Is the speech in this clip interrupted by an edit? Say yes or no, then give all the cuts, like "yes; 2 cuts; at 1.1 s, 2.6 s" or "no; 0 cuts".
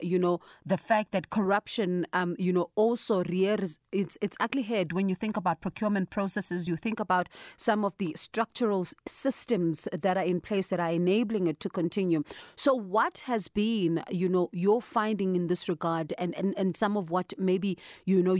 no; 0 cuts